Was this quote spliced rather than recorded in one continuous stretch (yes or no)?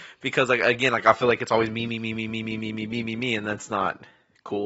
no